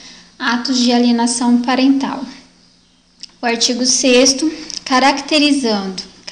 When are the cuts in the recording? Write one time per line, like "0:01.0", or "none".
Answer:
0:03.3